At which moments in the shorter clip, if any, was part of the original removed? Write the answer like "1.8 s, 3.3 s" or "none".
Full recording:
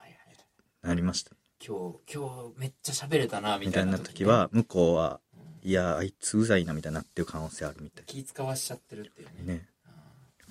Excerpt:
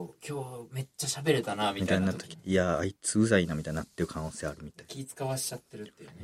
2.3 s

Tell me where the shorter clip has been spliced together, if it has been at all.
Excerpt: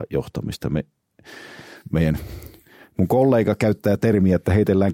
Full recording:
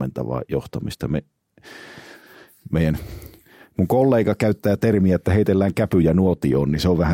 1.8 s

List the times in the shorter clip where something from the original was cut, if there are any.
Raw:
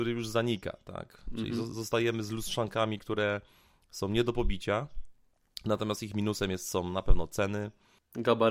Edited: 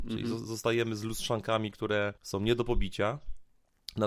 2.2 s

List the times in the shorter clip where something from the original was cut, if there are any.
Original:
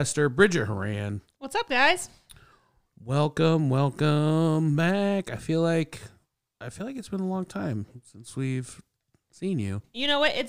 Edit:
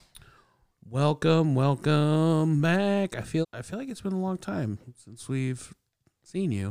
3.4 s

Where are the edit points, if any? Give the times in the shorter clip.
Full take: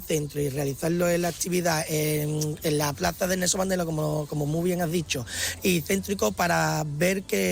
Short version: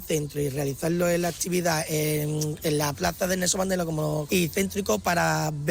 4.3 s

